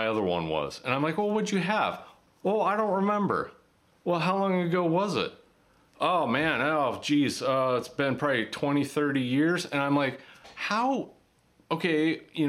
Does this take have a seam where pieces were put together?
no; 0 cuts

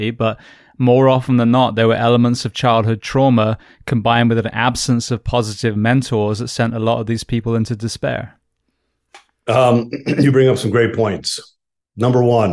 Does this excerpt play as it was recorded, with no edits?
yes; 0 cuts

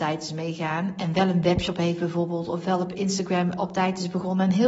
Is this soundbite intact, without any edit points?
no; 1 cut; at 3.6 s

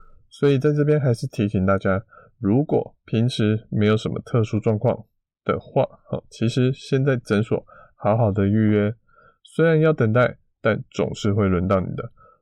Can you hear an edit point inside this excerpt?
no; 0 cuts

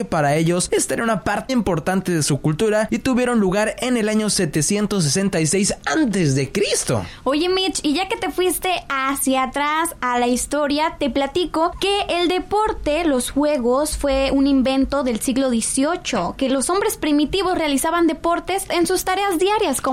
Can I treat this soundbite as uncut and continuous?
no; 1 cut; at 1.5 s

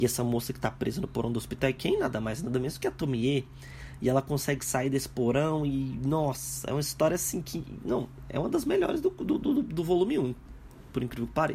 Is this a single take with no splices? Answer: yes; 0 cuts

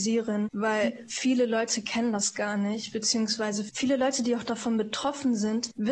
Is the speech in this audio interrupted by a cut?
no; 0 cuts

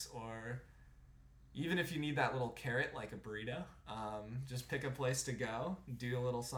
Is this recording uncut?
yes; 0 cuts

